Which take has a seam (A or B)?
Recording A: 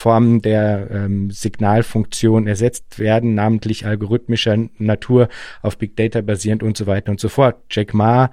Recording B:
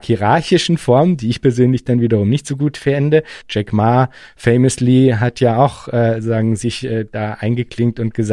B